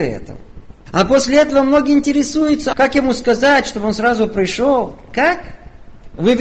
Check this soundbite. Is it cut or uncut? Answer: cut